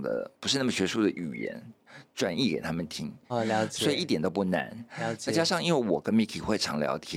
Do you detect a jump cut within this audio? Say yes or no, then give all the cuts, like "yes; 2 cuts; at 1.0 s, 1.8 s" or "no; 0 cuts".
yes; 1 cut; at 3.3 s